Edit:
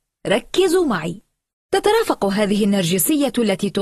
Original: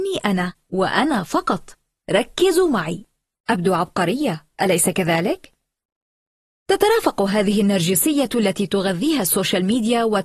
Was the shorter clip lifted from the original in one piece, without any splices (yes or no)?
no